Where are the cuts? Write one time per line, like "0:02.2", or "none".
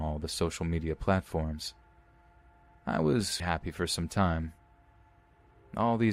0:03.4